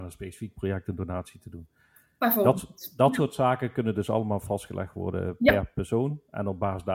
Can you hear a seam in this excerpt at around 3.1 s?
no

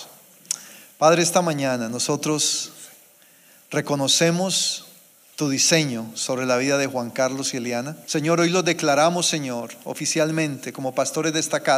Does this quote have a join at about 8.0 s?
yes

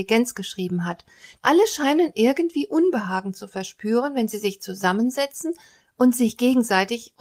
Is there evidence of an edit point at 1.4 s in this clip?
yes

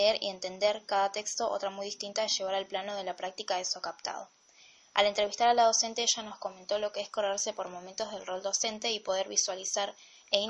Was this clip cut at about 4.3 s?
no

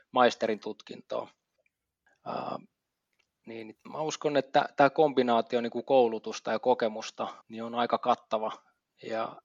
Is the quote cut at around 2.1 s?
no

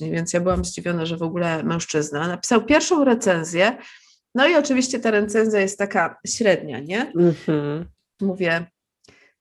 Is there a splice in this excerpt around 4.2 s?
no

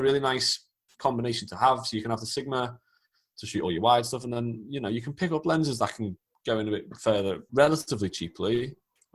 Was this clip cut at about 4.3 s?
no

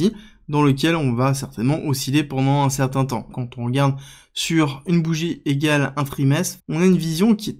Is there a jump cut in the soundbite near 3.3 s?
yes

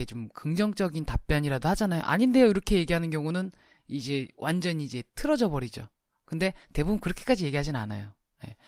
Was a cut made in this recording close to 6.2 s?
no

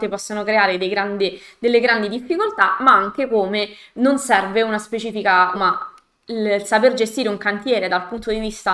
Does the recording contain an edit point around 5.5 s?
yes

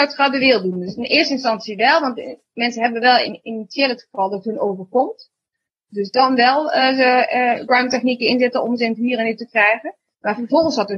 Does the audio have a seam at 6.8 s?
no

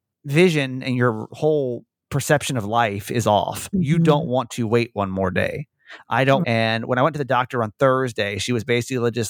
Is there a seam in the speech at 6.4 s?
yes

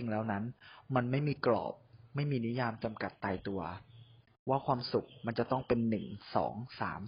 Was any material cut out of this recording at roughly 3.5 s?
no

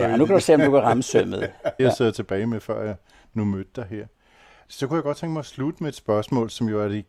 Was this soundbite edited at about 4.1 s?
no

